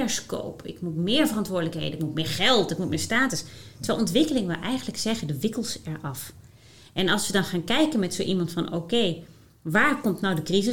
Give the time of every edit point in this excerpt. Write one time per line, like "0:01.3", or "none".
none